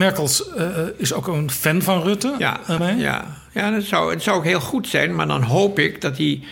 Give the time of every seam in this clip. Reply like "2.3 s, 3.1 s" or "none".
2.8 s